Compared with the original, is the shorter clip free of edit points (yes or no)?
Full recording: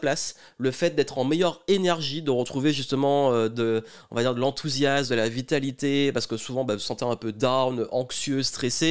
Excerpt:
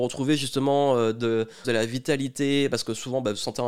no